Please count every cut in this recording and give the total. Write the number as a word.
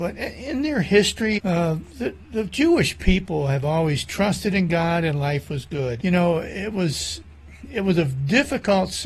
two